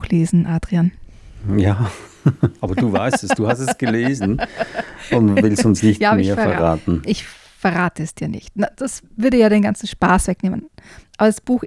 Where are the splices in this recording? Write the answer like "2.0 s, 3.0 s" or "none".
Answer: none